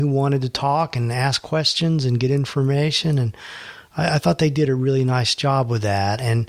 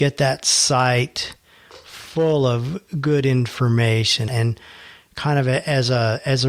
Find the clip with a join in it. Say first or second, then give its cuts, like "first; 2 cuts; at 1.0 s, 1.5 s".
second; 1 cut; at 4.3 s